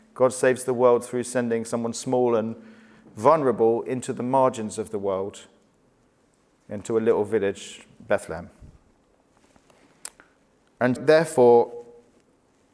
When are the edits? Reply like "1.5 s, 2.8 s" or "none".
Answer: 11.0 s